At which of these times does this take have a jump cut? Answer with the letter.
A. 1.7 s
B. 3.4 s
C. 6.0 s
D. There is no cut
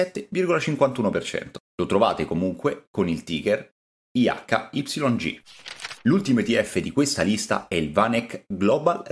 D